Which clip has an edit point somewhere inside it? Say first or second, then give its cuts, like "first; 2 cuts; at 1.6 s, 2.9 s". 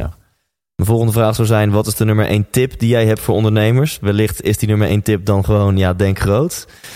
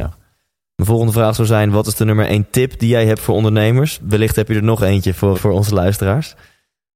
second; 2 cuts; at 4.0 s, 5.3 s